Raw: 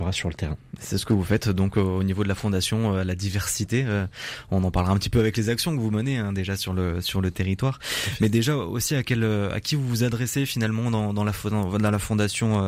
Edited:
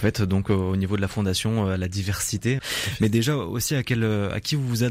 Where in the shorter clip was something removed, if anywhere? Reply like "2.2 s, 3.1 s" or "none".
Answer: 2.6 s